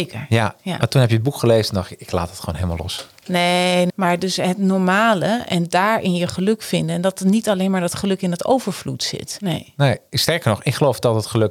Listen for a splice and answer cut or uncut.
cut